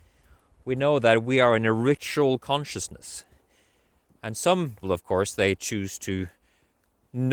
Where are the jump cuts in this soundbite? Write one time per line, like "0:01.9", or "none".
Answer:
0:04.8